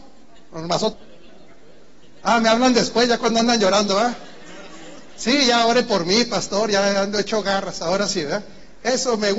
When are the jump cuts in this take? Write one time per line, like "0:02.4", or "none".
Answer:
0:00.9